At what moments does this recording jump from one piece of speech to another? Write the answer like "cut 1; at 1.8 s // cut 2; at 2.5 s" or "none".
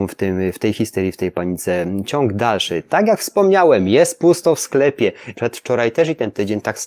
cut 1; at 5.3 s